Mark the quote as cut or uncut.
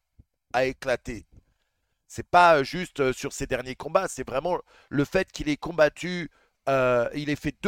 uncut